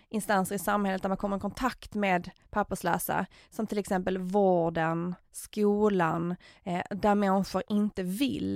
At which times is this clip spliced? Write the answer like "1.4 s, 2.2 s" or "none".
none